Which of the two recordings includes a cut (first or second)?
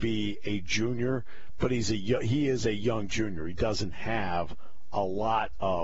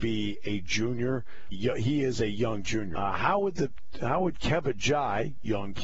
second